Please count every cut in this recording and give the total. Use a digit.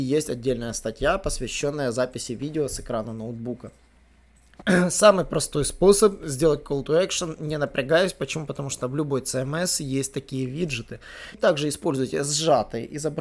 2